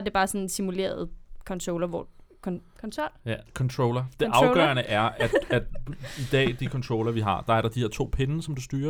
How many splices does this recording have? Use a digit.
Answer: 0